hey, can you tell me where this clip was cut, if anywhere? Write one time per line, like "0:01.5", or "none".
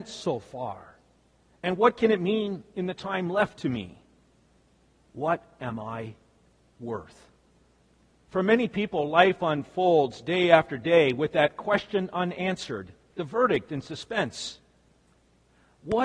0:08.2